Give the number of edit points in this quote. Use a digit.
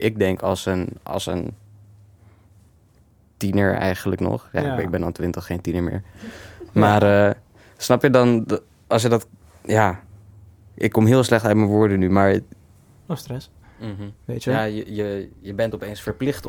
1